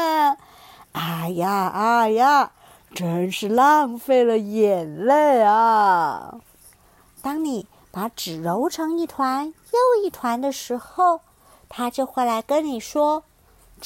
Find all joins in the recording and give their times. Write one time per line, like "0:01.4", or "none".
none